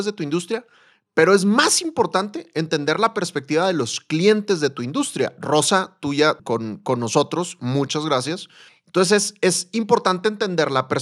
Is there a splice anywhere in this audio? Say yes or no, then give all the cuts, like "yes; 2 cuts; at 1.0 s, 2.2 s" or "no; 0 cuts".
yes; 2 cuts; at 6.4 s, 8.7 s